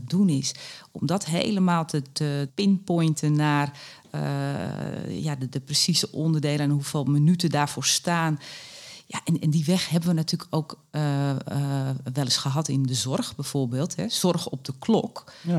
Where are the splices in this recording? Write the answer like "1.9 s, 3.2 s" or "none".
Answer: 2.5 s